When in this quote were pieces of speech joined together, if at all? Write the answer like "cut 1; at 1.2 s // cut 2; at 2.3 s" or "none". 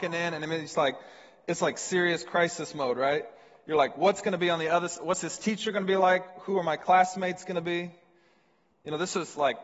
none